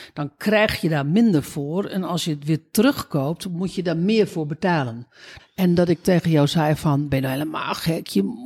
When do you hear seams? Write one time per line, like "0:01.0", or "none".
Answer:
0:05.4

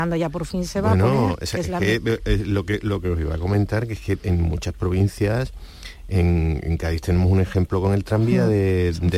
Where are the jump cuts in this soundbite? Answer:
none

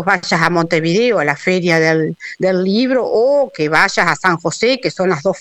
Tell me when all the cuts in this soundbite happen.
none

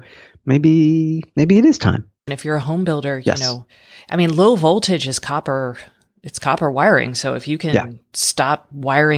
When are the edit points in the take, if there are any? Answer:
0:02.3

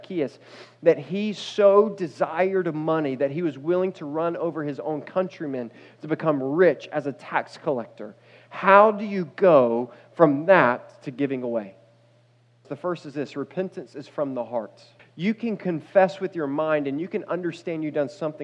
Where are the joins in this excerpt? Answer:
0:12.6
0:15.0

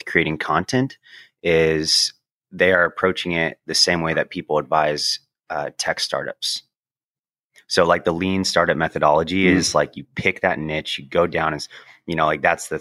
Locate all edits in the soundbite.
none

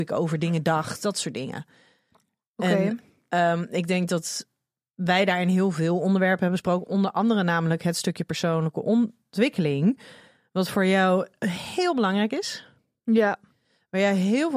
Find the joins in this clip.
none

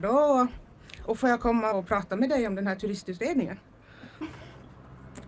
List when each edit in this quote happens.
0:01.7
0:04.2

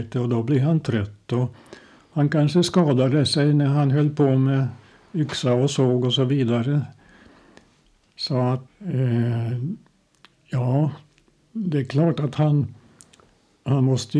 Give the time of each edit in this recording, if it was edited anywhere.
0:08.7

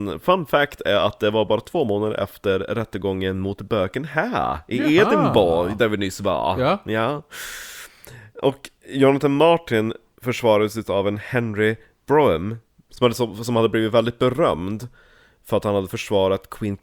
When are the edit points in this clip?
none

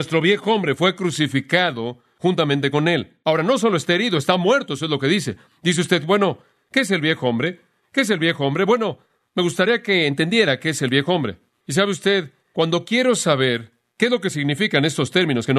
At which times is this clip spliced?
0:03.2

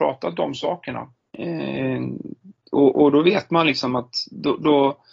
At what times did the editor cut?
0:01.3

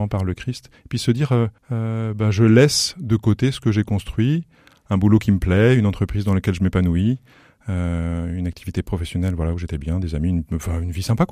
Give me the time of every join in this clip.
0:01.6

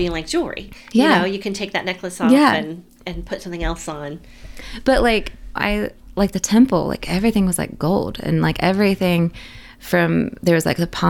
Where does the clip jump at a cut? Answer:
0:05.6

